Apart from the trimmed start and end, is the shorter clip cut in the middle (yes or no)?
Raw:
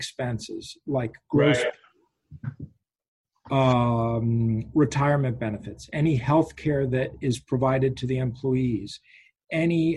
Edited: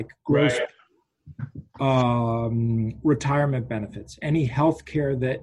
yes